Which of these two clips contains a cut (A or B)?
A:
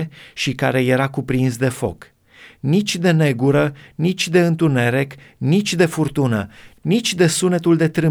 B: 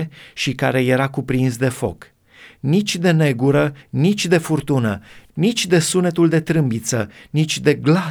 B